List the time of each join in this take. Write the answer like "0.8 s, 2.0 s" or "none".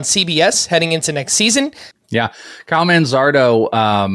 1.9 s

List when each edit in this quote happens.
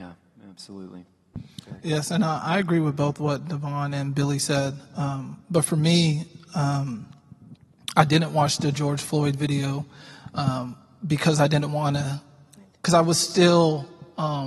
none

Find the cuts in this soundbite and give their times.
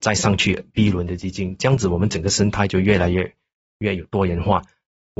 none

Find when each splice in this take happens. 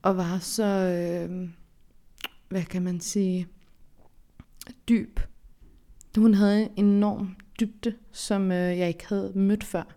none

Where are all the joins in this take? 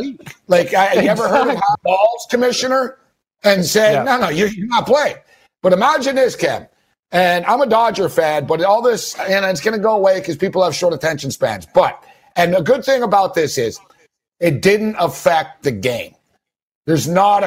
1.7 s

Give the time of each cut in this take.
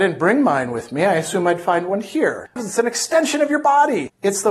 2.6 s

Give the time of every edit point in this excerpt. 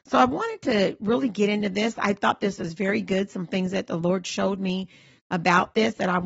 none

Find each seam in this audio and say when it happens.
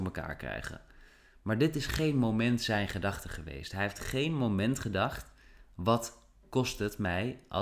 none

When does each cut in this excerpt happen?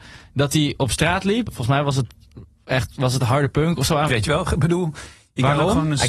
1.5 s, 4.1 s

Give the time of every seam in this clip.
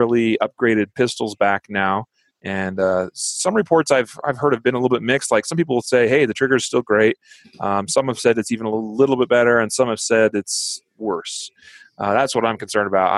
none

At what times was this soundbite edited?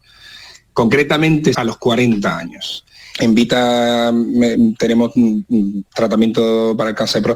1.5 s, 3.1 s

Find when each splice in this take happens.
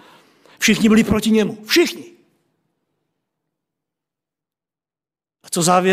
none

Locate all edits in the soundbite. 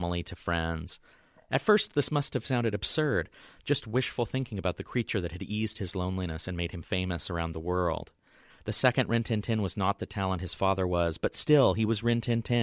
8.5 s

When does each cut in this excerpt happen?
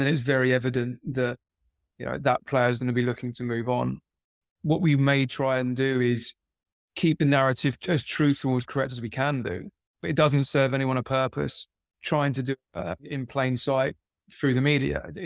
7.8 s, 13.0 s

